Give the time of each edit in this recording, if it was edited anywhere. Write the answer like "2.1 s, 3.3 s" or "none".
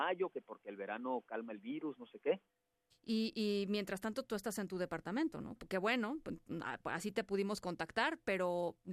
2.9 s, 5.6 s